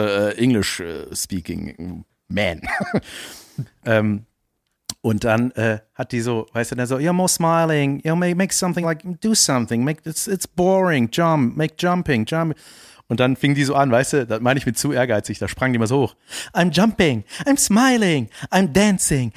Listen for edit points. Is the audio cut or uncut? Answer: uncut